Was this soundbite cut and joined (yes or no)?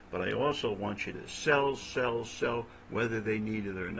no